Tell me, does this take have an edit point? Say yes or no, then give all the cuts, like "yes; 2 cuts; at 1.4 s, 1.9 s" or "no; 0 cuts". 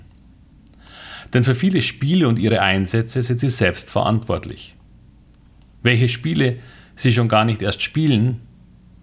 no; 0 cuts